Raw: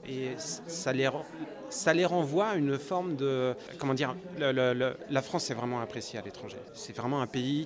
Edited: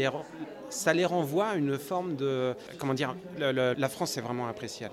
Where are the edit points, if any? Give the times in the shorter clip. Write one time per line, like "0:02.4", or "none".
0:03.7